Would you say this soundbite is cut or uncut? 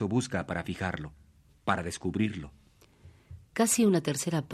uncut